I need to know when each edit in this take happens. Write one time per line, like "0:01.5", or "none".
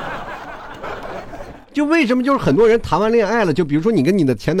none